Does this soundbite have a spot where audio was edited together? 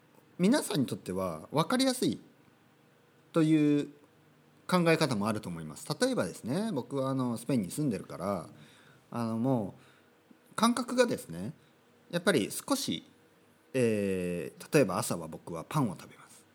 yes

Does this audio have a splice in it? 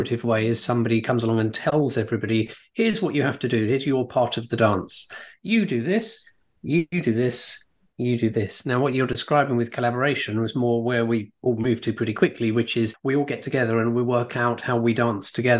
no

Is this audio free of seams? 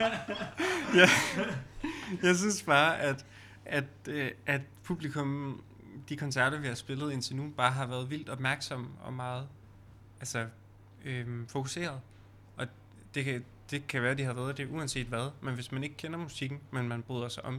yes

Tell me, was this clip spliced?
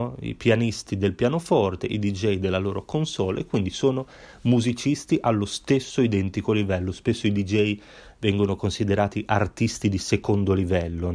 no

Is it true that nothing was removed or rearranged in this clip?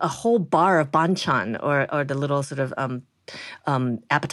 yes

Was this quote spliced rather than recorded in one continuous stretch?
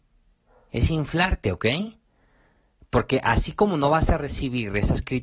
no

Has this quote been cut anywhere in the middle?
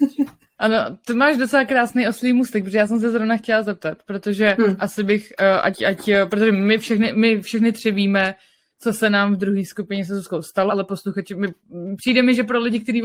yes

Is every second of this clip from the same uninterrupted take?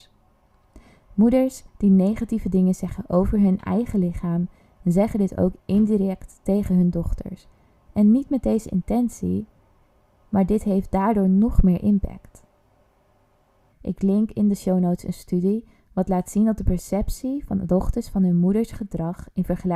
no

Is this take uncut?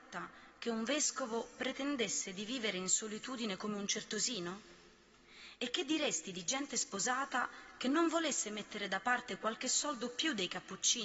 yes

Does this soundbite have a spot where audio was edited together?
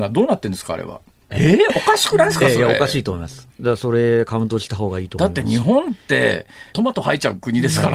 yes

